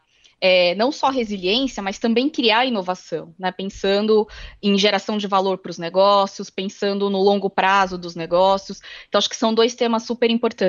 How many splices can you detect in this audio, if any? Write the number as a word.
zero